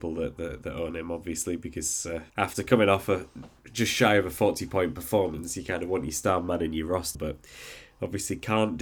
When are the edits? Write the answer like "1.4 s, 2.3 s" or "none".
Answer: 2.3 s, 7.1 s